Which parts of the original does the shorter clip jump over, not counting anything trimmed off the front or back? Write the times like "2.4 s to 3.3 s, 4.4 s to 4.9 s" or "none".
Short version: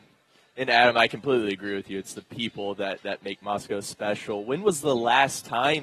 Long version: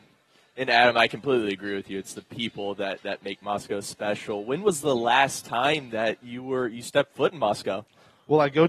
none